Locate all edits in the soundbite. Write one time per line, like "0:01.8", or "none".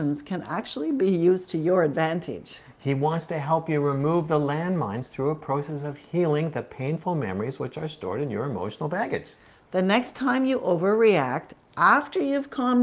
0:02.8

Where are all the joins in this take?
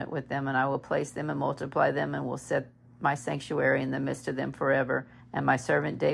0:05.2

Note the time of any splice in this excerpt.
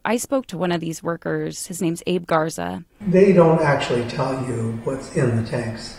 0:03.0

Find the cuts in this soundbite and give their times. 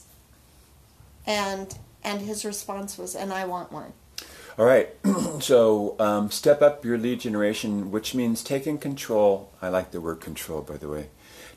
none

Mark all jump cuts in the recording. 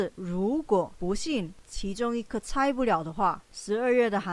none

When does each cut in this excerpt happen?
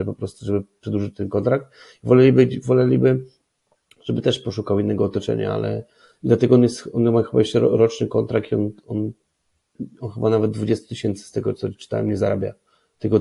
none

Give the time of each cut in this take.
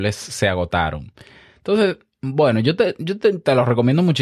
none

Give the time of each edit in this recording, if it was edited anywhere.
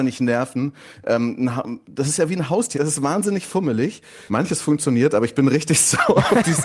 0:02.7
0:04.3

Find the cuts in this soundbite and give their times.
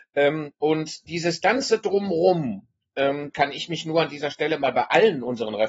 0:03.3

